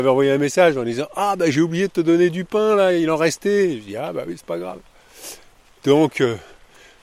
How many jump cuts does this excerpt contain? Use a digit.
1